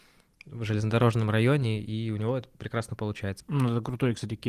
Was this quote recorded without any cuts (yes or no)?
no